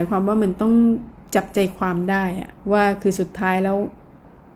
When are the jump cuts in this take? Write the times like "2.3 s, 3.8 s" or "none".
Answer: 2.6 s